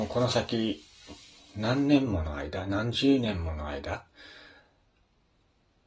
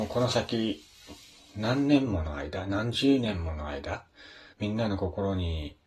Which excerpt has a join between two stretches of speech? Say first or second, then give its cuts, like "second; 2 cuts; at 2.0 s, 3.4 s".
second; 1 cut; at 4.5 s